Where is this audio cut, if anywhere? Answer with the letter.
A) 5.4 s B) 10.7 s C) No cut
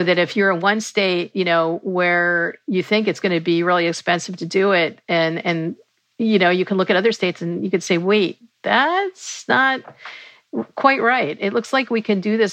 C